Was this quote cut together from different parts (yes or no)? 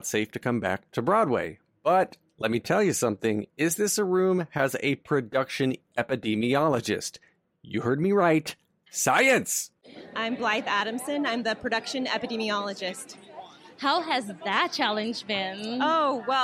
no